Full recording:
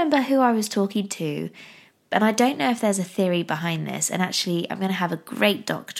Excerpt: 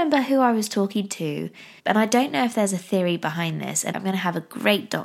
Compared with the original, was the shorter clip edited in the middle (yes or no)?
yes